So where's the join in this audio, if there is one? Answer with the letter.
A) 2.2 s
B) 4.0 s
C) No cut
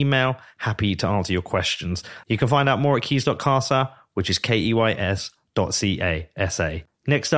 A